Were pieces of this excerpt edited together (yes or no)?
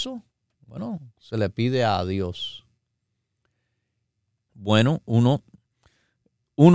yes